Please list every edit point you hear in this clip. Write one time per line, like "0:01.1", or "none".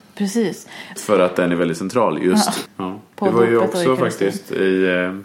0:01.0
0:02.7